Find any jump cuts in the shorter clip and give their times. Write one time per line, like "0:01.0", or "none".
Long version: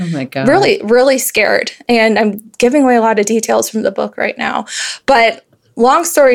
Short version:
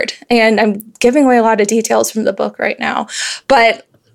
none